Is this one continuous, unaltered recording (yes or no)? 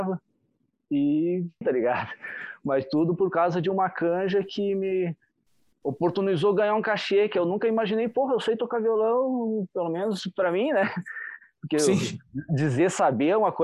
no